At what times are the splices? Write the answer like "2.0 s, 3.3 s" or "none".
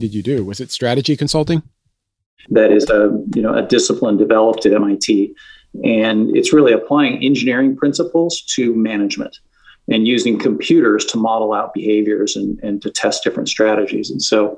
2.4 s